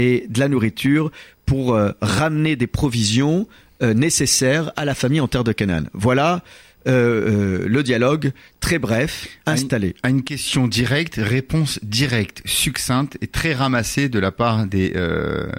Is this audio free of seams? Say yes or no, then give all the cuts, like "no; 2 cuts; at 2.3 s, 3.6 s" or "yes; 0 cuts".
yes; 0 cuts